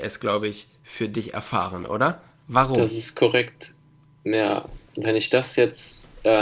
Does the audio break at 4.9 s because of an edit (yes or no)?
yes